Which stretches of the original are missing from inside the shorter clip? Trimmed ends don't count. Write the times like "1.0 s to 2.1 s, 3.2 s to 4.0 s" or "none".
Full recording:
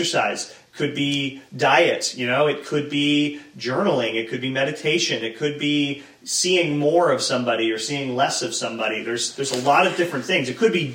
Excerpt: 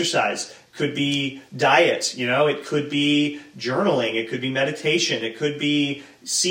none